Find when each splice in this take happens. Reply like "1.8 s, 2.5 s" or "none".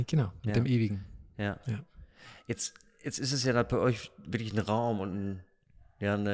none